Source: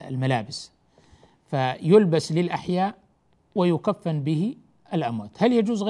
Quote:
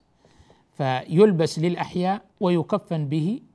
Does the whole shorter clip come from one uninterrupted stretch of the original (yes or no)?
no